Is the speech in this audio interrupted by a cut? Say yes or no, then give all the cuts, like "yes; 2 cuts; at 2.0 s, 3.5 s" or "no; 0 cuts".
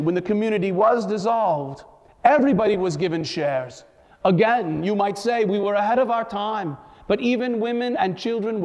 no; 0 cuts